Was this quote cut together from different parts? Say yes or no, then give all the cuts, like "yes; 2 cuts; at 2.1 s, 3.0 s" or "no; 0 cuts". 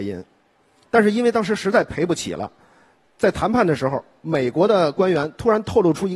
no; 0 cuts